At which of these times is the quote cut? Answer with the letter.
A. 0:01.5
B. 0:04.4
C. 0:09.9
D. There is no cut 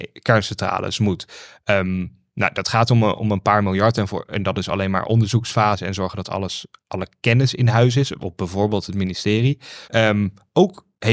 C